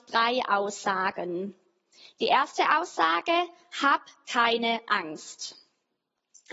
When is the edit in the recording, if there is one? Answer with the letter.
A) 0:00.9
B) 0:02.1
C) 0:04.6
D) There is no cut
D